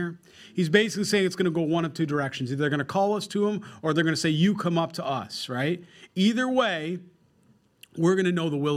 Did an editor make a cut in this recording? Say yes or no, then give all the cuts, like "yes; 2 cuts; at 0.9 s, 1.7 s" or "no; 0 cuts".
no; 0 cuts